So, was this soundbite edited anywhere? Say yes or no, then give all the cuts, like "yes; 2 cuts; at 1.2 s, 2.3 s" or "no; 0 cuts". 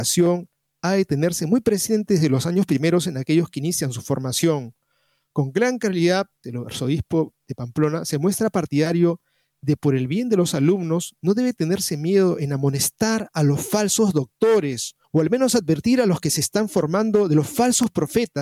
yes; 2 cuts; at 6.4 s, 15.0 s